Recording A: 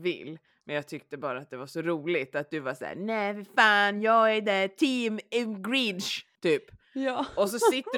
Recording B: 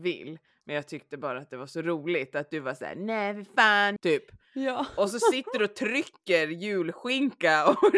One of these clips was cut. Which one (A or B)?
B